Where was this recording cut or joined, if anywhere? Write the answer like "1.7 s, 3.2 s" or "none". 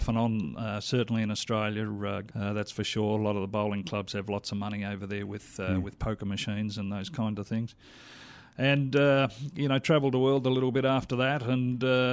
2.3 s